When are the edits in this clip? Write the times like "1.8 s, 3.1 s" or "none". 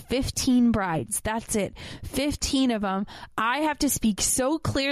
none